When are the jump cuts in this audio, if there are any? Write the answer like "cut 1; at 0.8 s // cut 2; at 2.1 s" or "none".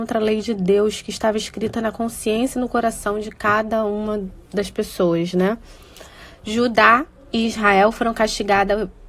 cut 1; at 4.4 s